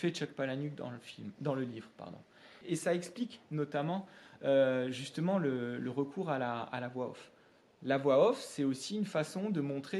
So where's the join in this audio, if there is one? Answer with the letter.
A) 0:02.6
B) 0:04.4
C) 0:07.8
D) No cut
A